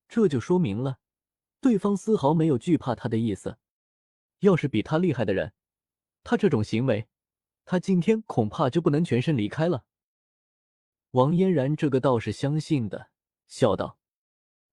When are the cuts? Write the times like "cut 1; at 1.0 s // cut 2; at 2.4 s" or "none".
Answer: cut 1; at 4.3 s // cut 2; at 13.3 s